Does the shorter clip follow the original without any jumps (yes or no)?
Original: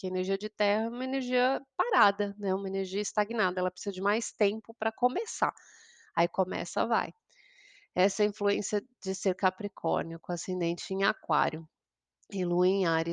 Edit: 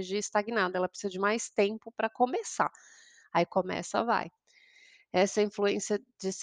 yes